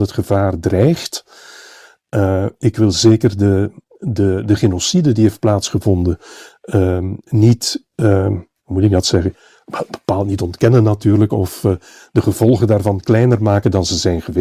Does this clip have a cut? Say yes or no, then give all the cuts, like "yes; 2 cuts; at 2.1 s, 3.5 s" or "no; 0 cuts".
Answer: no; 0 cuts